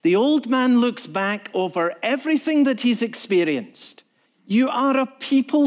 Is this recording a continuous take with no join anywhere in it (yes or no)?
no